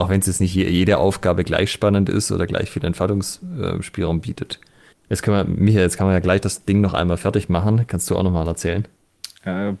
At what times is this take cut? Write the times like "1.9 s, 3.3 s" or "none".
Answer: 4.9 s